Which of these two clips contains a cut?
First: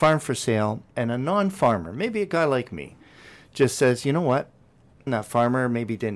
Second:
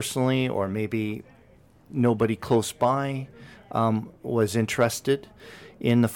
first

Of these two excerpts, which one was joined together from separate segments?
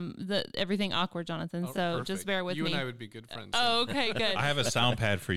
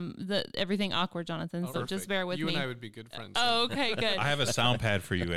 second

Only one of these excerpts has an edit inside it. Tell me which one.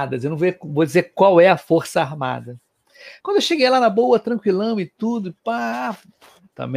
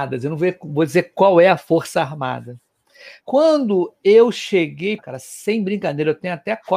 second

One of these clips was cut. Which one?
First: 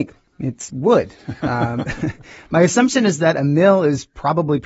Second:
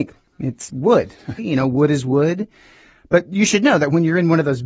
second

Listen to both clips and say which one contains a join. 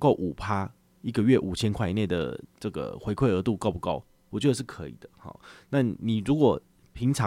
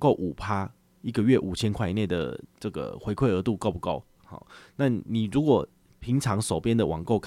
second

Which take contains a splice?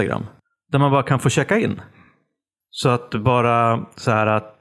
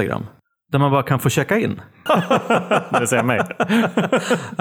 second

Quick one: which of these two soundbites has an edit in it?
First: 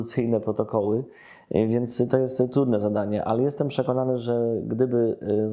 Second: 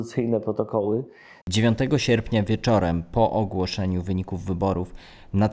second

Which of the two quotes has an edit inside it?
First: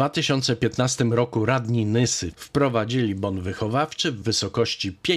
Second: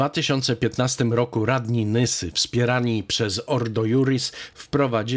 first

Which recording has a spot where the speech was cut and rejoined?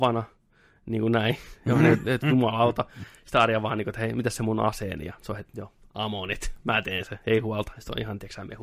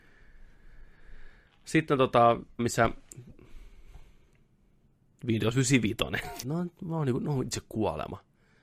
second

